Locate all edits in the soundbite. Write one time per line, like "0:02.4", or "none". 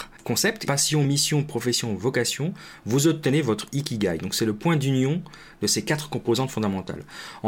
none